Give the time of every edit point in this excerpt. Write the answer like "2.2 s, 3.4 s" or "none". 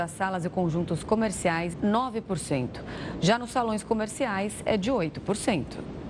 1.7 s